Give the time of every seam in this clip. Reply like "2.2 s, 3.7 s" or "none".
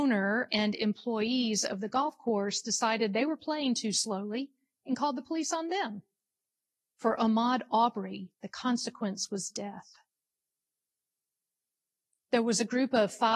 6.8 s, 8.3 s, 12.2 s